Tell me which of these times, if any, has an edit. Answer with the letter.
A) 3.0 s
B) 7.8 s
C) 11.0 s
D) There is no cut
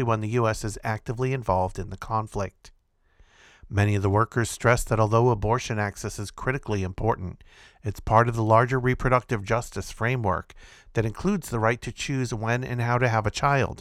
D